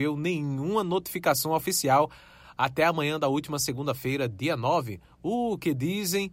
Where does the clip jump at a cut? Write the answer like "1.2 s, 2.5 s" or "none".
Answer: none